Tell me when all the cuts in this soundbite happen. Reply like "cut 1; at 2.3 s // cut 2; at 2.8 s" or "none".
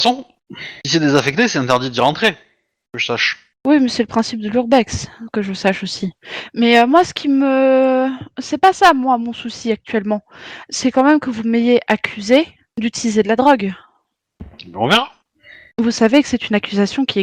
none